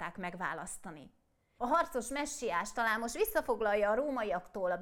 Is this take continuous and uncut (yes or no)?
no